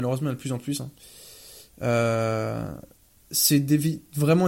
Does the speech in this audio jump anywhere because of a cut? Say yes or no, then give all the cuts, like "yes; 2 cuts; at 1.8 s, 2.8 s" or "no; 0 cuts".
no; 0 cuts